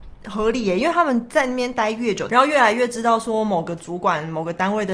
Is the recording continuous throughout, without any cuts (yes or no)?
no